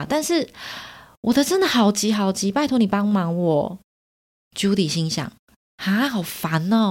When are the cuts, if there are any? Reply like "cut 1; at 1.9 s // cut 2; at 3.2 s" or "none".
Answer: none